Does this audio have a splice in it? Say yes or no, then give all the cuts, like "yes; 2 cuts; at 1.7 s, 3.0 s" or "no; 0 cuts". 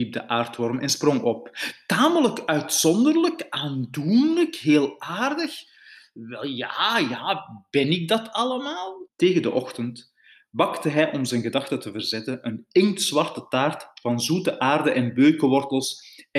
yes; 1 cut; at 9.1 s